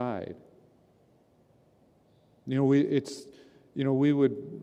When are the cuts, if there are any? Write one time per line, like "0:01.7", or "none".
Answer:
none